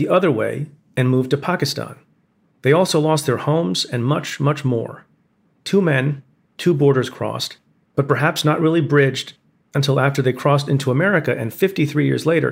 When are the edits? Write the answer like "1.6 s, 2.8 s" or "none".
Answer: none